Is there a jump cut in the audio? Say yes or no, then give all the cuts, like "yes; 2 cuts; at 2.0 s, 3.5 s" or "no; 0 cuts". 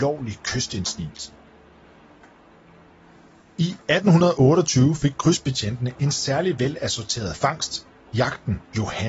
no; 0 cuts